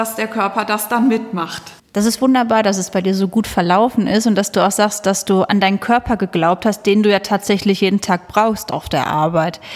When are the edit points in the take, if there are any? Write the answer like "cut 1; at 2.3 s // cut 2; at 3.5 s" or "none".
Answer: cut 1; at 1.8 s